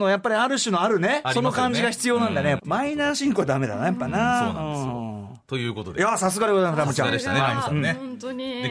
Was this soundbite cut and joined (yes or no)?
yes